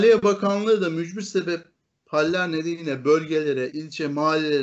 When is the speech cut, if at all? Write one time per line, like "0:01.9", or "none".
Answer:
0:03.7